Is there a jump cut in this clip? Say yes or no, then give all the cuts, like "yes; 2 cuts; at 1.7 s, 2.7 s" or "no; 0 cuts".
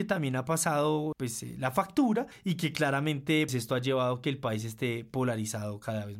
yes; 2 cuts; at 1.1 s, 3.5 s